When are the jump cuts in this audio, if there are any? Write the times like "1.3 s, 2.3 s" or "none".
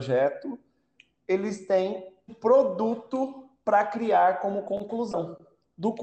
2.3 s